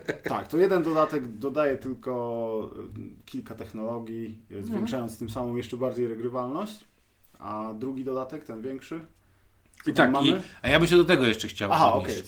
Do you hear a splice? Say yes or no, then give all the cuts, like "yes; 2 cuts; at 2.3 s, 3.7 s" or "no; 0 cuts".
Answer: no; 0 cuts